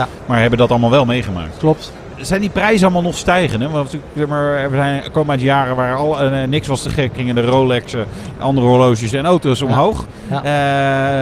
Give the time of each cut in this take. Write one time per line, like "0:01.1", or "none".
0:07.1